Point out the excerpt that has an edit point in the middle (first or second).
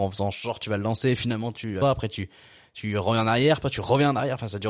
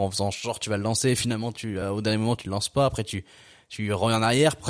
first